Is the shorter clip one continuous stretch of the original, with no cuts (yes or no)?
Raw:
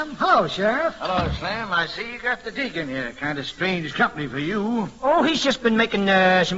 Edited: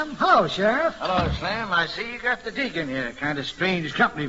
yes